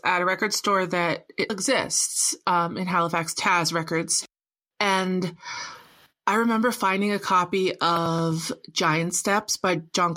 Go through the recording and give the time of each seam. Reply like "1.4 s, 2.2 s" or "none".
1.5 s